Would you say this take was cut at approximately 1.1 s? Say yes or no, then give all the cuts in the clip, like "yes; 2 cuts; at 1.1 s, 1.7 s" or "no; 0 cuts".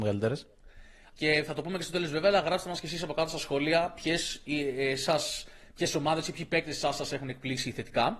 yes; 1 cut; at 1.1 s